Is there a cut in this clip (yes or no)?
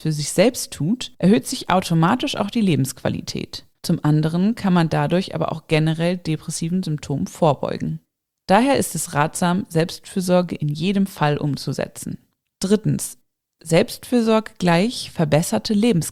yes